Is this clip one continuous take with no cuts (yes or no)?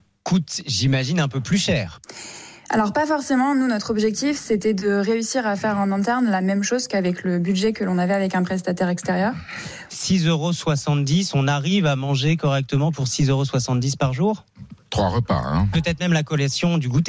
no